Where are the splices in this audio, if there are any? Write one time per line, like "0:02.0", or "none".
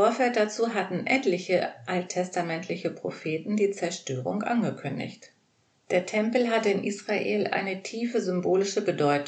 0:05.8